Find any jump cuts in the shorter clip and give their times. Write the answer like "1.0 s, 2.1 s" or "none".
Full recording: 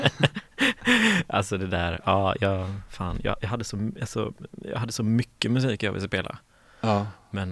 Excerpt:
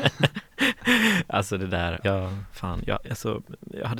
2.0 s, 3.0 s